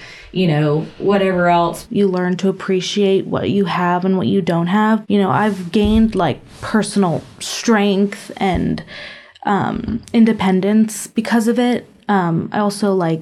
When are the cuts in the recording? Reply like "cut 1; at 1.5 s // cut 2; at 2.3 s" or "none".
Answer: cut 1; at 1.8 s // cut 2; at 5.0 s